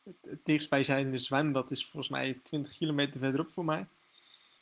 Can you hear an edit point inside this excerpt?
no; 0 cuts

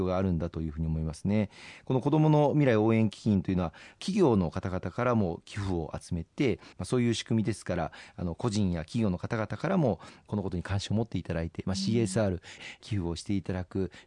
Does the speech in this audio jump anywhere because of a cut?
yes; 2 cuts; at 6.7 s, 12.6 s

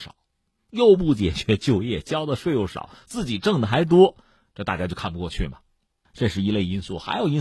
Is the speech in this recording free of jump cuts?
yes; 0 cuts

